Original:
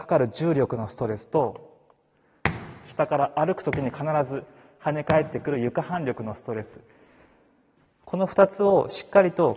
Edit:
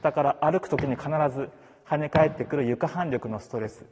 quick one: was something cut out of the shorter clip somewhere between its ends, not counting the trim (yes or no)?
no